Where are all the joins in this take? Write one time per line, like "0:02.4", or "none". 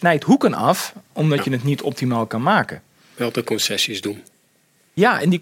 none